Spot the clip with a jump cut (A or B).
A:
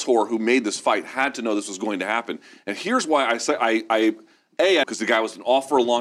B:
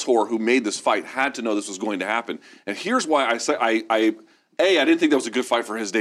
A